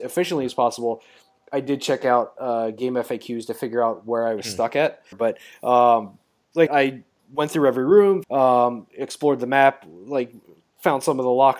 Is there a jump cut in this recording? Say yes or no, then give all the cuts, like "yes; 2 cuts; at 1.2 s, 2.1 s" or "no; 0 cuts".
yes; 3 cuts; at 5.1 s, 6.7 s, 8.2 s